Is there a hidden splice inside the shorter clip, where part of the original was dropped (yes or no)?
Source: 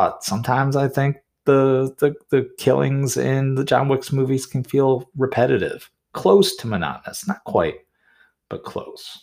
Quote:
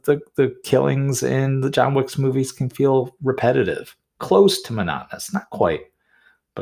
no